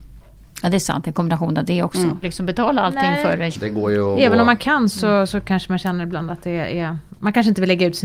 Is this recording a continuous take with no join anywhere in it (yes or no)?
no